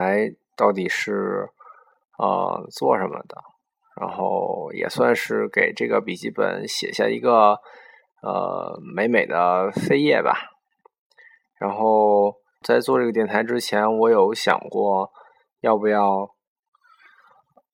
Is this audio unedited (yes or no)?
no